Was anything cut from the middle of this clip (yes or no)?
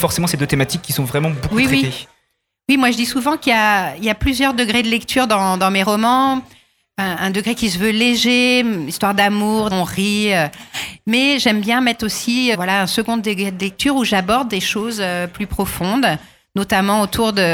yes